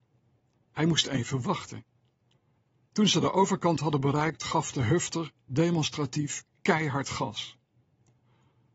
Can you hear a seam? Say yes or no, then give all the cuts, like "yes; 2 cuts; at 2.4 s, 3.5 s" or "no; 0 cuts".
no; 0 cuts